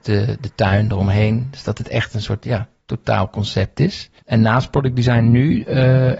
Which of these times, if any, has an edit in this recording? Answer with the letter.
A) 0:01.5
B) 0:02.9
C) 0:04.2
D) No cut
C